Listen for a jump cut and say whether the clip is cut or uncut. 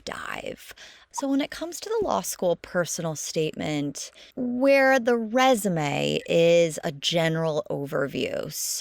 cut